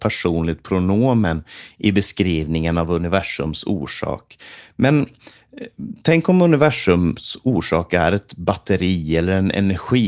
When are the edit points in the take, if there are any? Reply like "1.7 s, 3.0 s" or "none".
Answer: none

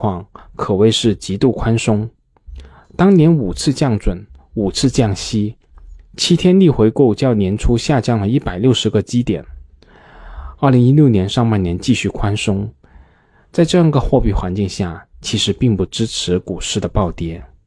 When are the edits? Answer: none

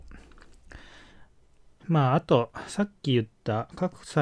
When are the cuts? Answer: 1.8 s

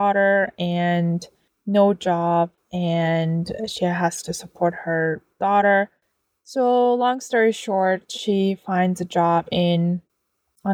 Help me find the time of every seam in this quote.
none

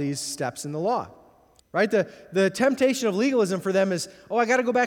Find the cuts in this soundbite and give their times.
1.6 s

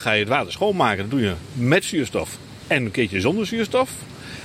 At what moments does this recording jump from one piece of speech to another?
none

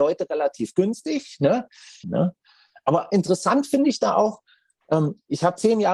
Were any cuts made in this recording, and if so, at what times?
2.0 s

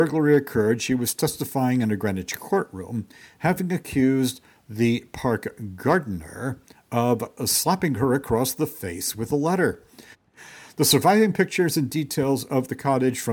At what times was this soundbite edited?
10.1 s

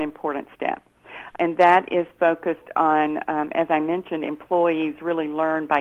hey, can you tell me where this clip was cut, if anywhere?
1.3 s

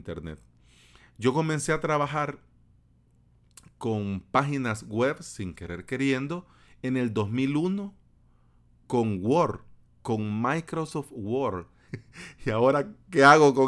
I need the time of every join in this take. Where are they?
11.9 s

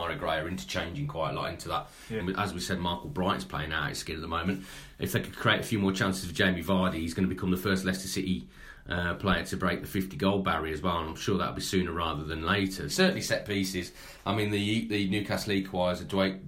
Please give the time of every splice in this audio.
2.2 s, 12.9 s

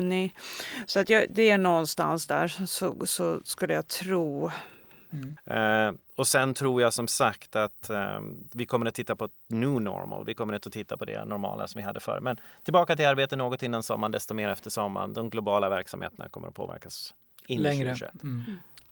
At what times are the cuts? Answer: 5.4 s

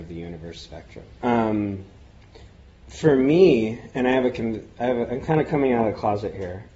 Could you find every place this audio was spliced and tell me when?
1.2 s

